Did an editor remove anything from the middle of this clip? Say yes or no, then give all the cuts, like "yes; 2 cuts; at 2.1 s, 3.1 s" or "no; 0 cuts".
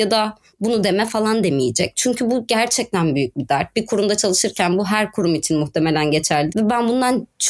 yes; 1 cut; at 6.5 s